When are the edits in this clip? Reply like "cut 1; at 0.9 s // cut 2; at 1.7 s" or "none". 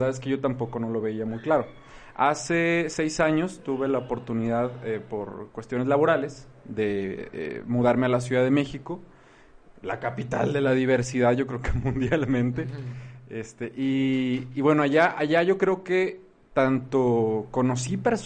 none